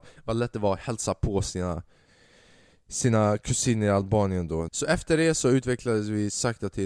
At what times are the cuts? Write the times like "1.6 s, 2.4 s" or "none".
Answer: 4.7 s